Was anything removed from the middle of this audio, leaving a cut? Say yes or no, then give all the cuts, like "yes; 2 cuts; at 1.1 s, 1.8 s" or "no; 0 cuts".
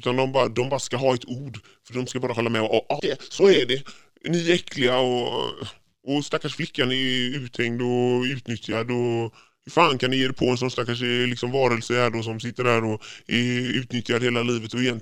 yes; 1 cut; at 3.0 s